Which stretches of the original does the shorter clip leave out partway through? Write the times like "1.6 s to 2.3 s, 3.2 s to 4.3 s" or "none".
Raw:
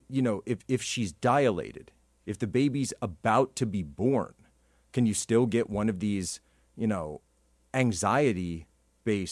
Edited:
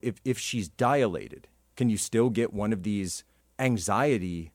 2.1 s to 4.9 s, 6.6 s to 7.6 s